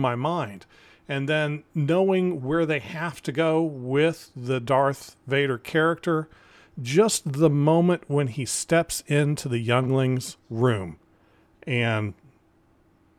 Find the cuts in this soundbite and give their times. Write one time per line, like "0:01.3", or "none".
none